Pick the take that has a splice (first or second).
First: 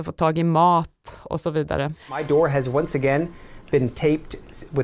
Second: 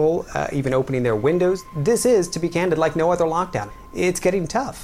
first